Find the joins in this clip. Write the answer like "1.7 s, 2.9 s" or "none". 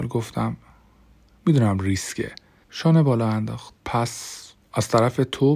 2.6 s, 3.8 s